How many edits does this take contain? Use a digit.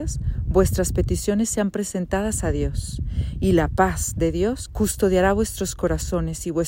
1